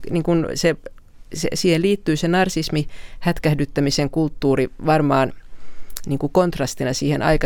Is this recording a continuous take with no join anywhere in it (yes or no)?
yes